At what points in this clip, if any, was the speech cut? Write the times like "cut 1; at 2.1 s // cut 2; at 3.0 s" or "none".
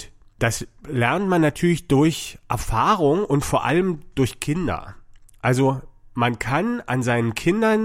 none